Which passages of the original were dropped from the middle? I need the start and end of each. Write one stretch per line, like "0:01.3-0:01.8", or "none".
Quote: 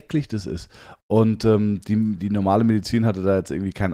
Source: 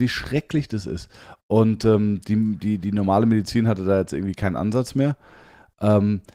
0:02.6-0:02.8

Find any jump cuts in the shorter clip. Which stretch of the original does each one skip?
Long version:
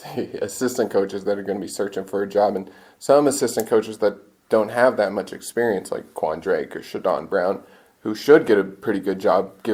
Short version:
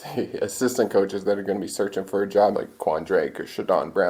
0:02.5-0:05.9

